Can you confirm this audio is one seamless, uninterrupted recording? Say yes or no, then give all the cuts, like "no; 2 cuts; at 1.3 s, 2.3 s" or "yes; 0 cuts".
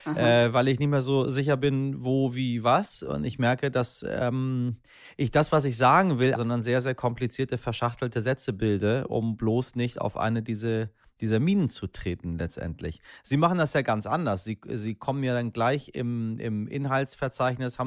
no; 1 cut; at 6.4 s